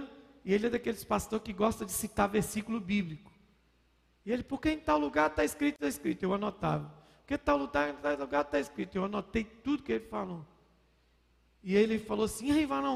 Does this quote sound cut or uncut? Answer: uncut